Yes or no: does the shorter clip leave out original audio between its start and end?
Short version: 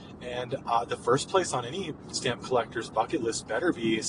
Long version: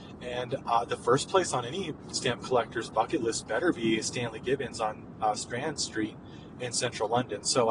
no